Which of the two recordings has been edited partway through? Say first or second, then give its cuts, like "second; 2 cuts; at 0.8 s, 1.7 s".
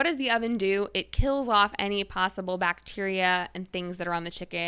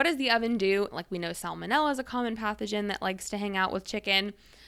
second; 1 cut; at 0.9 s